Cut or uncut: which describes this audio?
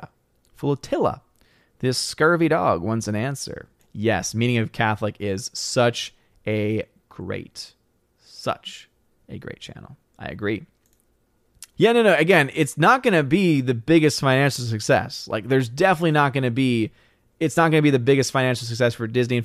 cut